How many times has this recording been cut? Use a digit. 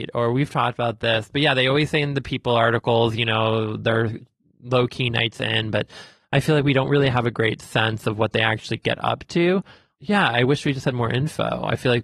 0